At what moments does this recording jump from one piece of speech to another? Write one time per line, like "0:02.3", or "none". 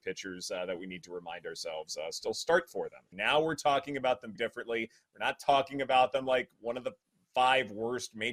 0:03.1
0:04.4